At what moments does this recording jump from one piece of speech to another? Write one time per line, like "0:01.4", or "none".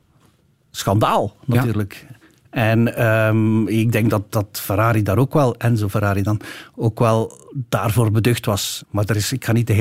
0:08.8